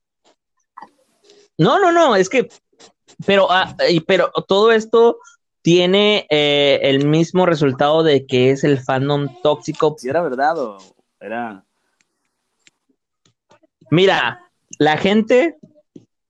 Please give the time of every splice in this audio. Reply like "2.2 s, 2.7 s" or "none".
10.0 s